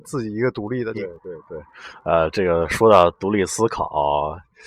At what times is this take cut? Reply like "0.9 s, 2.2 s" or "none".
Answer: 0.9 s